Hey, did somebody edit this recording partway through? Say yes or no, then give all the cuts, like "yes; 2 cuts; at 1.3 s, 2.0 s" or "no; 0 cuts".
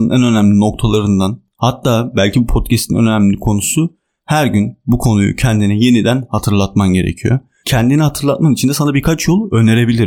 yes; 1 cut; at 7.6 s